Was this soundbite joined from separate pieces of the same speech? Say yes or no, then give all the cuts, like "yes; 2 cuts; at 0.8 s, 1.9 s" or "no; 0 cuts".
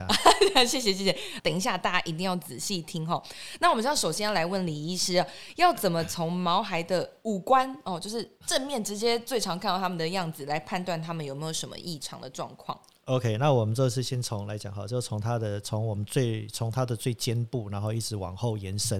yes; 1 cut; at 1.4 s